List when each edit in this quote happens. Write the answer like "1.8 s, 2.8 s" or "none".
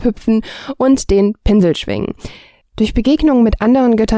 2.6 s